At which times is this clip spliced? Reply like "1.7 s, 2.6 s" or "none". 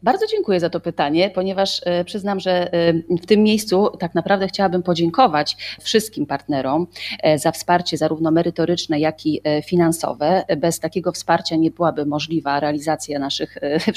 none